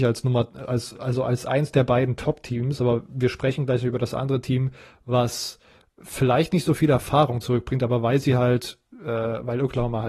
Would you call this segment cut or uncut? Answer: uncut